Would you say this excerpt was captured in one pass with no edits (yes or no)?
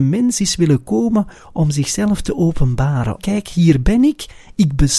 no